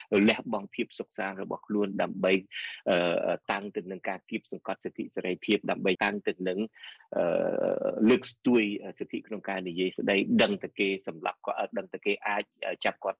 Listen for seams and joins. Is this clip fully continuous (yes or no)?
no